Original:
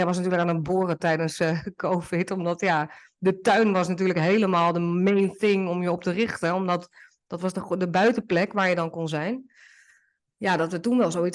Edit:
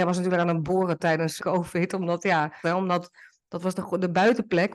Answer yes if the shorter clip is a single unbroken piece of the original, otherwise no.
no